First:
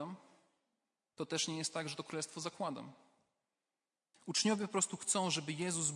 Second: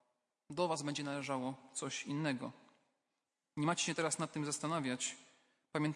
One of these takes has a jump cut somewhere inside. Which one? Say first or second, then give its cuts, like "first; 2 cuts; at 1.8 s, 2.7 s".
first; 1 cut; at 4.1 s